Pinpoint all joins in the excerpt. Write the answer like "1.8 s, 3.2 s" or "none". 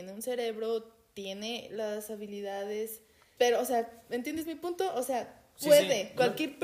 3.4 s